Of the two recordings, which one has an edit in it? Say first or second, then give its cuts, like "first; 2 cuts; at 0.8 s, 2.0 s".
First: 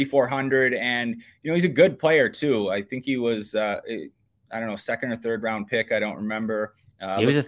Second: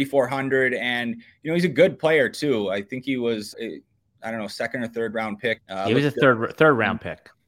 second; 2 cuts; at 3.5 s, 5.6 s